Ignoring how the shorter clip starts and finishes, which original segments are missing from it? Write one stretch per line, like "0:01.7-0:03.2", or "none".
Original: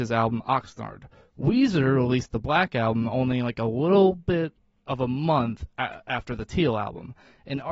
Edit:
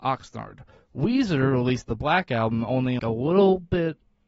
0:03.4-0:03.6

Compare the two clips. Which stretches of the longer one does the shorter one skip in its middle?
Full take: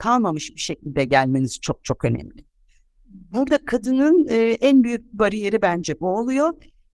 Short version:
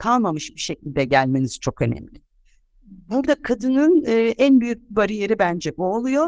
0:01.6-0:01.8

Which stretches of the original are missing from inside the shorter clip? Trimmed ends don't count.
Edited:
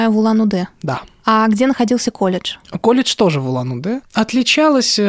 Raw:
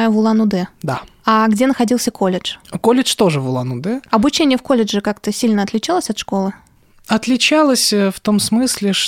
0:04.0-0:07.0

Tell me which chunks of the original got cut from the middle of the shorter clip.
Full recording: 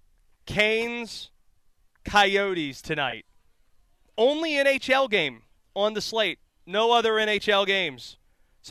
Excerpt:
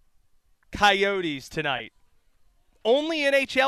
none

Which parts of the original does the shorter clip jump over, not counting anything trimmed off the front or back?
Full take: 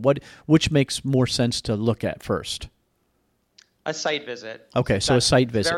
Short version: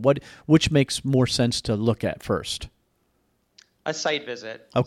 none

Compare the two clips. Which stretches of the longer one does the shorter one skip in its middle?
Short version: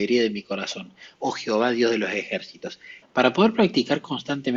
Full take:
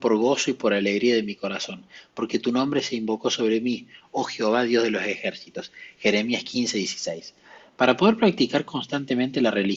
0:02.1-0:04.1
0:05.9-0:07.7

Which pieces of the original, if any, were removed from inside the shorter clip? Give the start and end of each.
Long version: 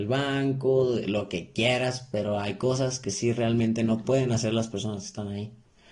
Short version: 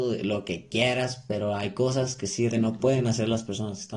0:03.3-0:03.7

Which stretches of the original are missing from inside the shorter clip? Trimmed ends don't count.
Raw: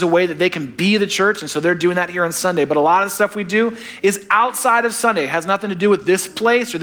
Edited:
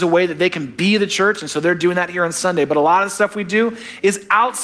none

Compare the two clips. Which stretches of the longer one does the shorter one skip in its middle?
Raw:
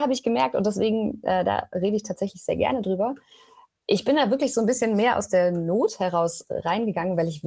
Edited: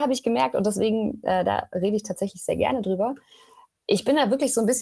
none

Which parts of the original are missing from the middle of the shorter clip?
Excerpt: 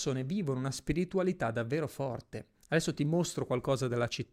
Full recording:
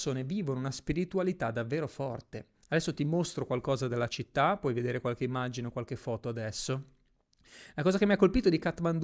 none

